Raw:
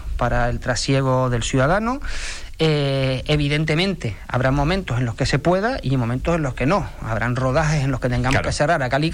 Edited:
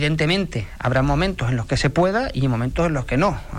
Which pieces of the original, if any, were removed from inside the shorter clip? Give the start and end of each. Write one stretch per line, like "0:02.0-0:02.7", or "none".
none